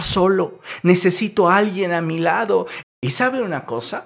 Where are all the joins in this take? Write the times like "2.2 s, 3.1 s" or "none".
2.8 s